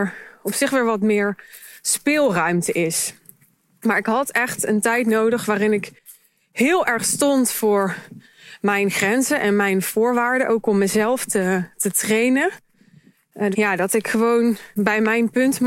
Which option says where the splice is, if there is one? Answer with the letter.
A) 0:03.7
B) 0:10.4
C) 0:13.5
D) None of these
C